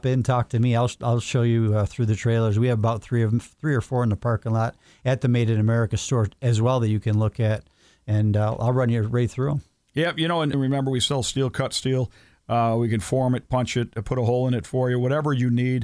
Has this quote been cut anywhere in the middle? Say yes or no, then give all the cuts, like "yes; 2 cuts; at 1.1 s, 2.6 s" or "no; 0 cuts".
yes; 1 cut; at 10.5 s